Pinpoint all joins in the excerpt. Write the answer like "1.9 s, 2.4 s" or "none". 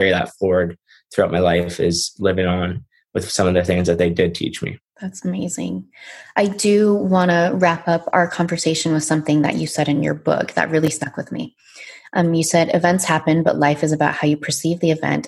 none